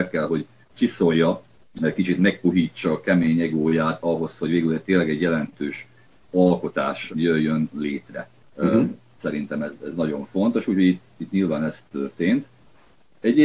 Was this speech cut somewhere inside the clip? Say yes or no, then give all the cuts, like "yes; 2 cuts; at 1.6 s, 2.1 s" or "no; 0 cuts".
no; 0 cuts